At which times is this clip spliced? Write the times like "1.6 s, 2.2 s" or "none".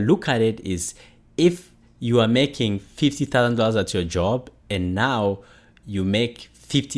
none